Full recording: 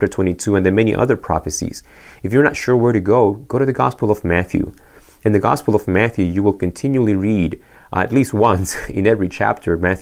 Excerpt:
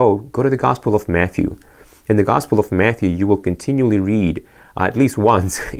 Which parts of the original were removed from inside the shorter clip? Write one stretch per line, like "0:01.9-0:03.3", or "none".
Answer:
none